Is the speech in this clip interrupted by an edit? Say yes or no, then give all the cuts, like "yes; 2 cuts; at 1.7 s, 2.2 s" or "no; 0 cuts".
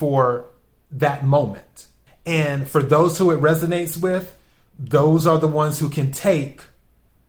yes; 1 cut; at 2.1 s